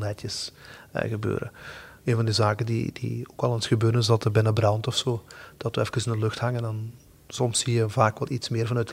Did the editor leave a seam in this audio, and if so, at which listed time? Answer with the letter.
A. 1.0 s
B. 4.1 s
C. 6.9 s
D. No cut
D